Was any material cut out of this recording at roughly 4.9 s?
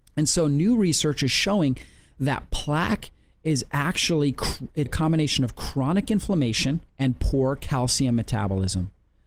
yes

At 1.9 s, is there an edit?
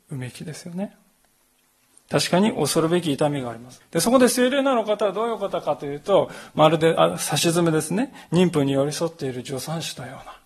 no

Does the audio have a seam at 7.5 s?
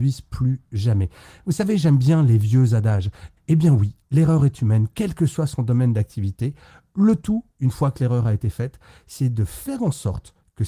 no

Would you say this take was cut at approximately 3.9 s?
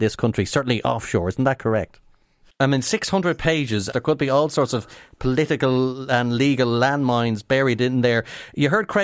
yes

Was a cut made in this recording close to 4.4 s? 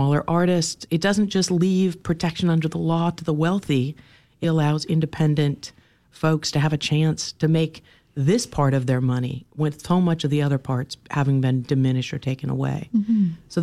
yes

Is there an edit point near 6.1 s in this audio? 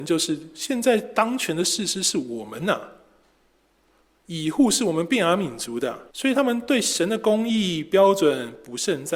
yes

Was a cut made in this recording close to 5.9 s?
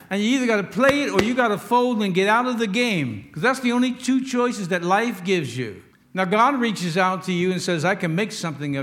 yes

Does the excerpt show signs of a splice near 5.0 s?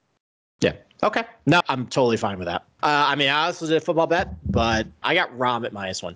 yes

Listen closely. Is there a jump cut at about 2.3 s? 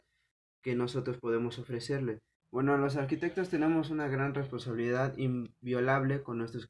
yes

